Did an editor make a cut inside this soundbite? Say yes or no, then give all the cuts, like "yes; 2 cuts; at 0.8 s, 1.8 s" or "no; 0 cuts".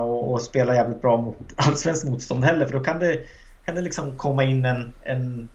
no; 0 cuts